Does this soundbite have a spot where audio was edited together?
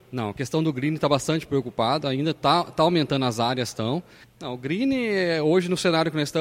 yes; 1 cut; at 4.2 s

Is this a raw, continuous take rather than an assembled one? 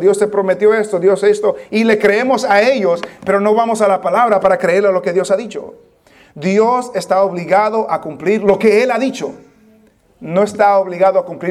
yes; 0 cuts

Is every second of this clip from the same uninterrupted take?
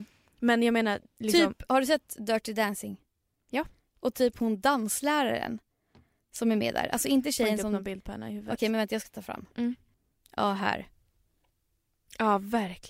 yes; 0 cuts

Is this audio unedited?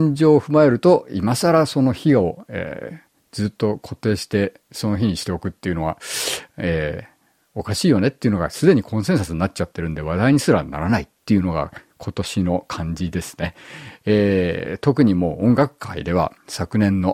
yes; 0 cuts

